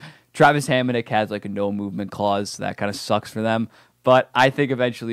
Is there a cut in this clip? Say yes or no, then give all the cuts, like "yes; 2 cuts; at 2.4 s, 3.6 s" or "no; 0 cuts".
no; 0 cuts